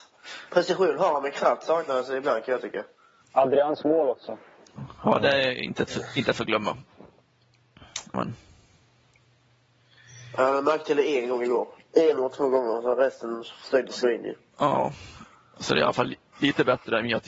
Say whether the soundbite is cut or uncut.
cut